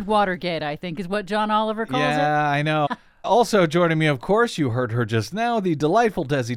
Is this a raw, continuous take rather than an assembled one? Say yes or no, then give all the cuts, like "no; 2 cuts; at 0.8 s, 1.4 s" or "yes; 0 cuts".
no; 1 cut; at 2.9 s